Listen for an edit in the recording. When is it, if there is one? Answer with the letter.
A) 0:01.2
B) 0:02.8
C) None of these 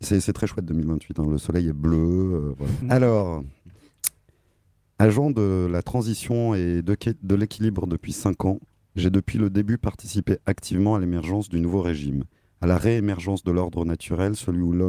B